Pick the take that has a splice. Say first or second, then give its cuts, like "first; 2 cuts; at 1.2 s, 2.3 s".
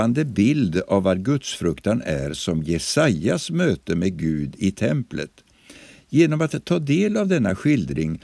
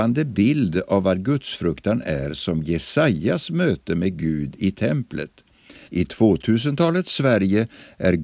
second; 1 cut; at 5.9 s